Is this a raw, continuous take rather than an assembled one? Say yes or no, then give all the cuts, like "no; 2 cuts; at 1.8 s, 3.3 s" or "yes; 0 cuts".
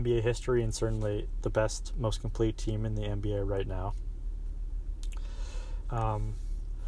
no; 1 cut; at 5.8 s